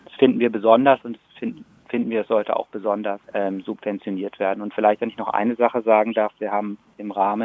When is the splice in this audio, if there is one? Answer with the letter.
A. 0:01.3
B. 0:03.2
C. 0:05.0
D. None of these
B